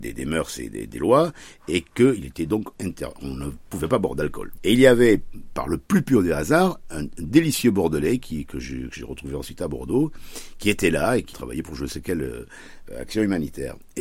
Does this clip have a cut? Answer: yes; 3 cuts; at 4.6 s, 6.8 s, 11.3 s

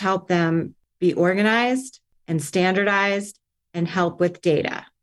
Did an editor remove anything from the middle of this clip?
no; 0 cuts

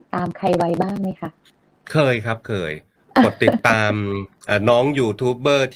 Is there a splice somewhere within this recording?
no; 0 cuts

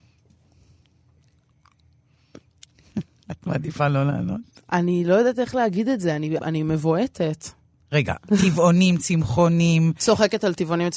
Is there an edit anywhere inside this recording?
yes; 1 cut; at 6.4 s

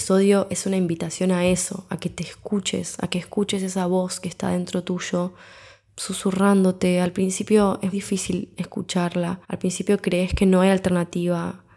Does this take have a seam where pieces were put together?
yes; 2 cuts; at 7.9 s, 9.4 s

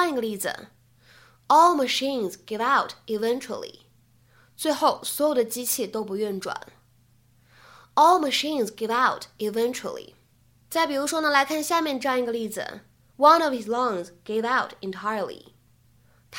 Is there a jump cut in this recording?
no; 0 cuts

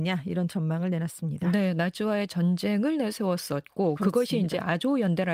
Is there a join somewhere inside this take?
no; 0 cuts

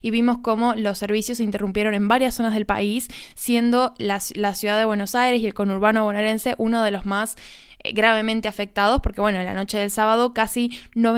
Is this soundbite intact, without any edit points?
yes; 0 cuts

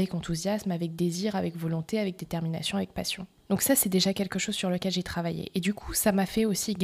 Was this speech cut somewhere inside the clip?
no; 0 cuts

